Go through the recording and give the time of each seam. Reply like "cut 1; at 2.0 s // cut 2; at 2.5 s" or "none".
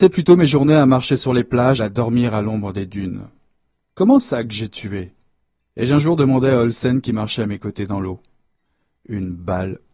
cut 1; at 1.8 s // cut 2; at 3.9 s